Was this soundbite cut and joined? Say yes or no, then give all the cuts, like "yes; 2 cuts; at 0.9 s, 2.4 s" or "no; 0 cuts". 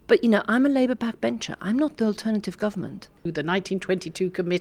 yes; 1 cut; at 3.3 s